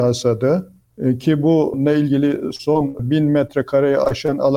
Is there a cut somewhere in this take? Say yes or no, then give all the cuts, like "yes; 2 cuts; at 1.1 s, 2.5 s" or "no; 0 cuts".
no; 0 cuts